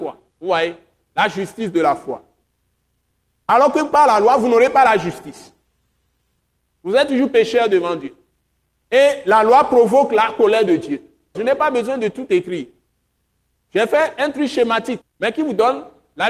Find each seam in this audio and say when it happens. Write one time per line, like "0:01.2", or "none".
0:11.3
0:15.0

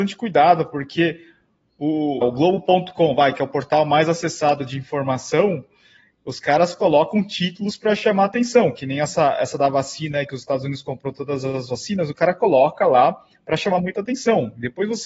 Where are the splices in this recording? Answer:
0:02.2

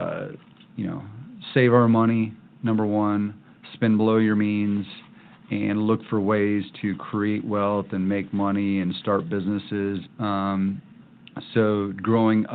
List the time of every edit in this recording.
0:10.0

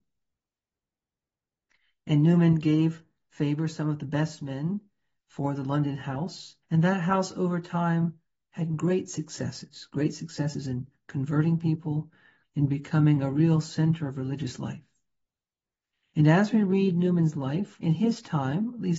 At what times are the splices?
0:06.6
0:12.4
0:17.8

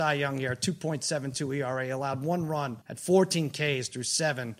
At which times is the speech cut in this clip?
0:02.8

